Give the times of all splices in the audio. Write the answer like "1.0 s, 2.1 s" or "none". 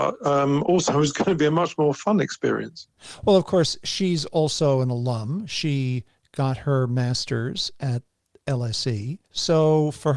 9.2 s